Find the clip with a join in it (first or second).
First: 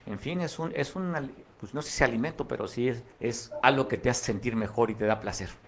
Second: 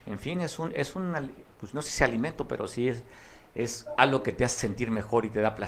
first